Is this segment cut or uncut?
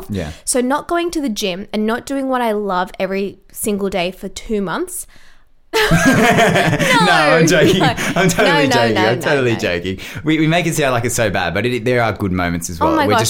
cut